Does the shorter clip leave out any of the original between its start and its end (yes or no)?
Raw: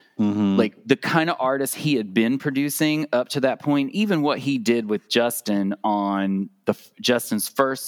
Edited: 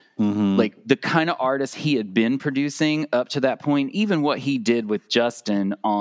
no